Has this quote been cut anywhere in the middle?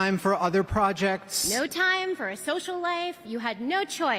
no; 0 cuts

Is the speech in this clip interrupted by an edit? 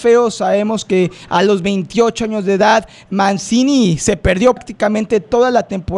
yes; 1 cut; at 4.6 s

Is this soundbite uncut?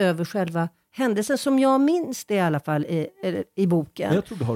yes; 0 cuts

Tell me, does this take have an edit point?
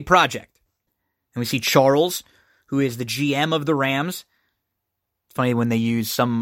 no; 0 cuts

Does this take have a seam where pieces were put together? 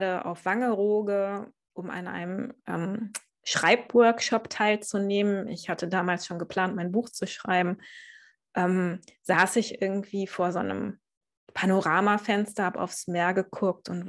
no; 0 cuts

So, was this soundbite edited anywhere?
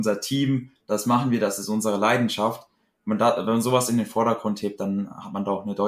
no; 0 cuts

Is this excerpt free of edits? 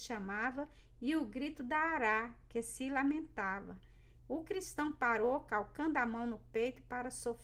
no; 1 cut; at 4.2 s

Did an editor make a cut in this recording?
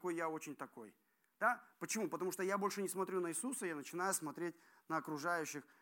no; 0 cuts

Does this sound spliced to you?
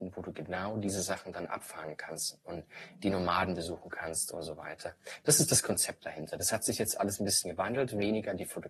no; 0 cuts

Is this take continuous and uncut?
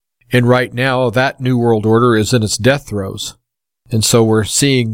yes; 0 cuts

